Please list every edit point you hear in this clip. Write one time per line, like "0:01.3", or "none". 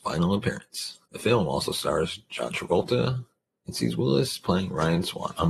0:01.1

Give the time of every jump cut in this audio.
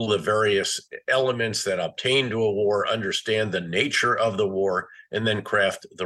none

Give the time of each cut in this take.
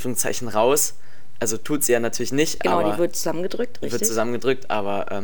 none

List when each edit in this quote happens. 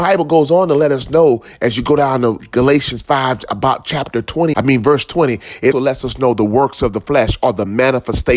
0:04.5
0:05.7

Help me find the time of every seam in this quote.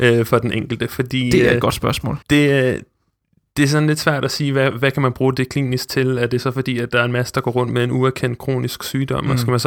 0:02.2

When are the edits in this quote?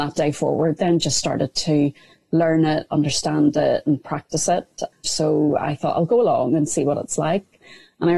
0:05.0

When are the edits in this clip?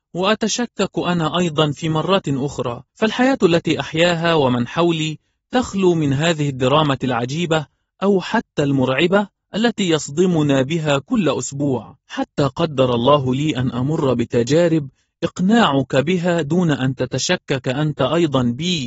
0:02.9
0:12.0

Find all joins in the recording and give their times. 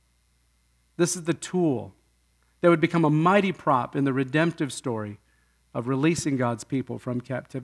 none

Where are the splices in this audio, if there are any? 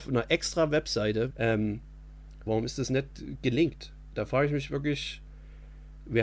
0:01.3
0:02.5

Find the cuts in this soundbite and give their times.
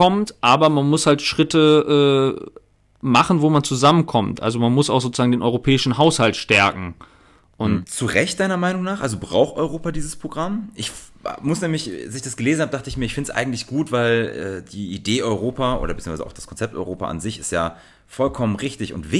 0:07.8

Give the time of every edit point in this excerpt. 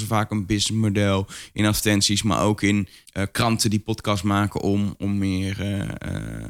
0:03.1

